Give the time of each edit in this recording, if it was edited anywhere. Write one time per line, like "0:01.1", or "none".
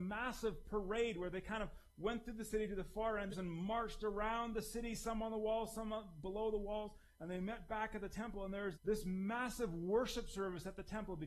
0:03.3
0:08.7